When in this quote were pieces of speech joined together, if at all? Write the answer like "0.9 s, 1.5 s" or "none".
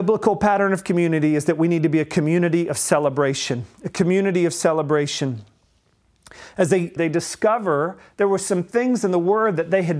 7.0 s